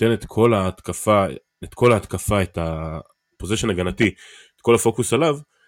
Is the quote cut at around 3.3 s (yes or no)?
yes